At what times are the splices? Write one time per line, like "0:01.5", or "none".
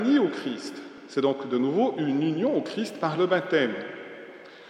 none